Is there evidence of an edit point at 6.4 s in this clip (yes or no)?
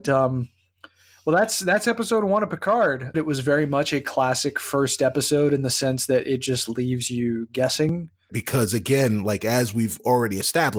no